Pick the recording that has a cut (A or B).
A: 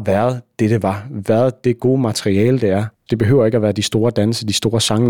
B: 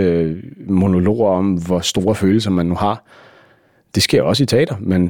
A